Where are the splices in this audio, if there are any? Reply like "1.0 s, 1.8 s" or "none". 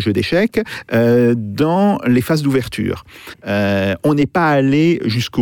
3.3 s